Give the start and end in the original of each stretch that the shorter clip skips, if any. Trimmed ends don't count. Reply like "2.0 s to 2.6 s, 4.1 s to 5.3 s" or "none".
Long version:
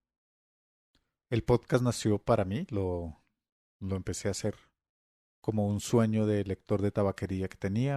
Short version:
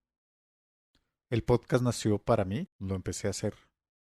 2.7 s to 3.7 s